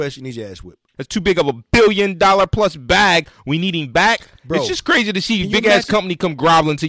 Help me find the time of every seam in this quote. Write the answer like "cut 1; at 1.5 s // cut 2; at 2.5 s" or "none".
cut 1; at 0.9 s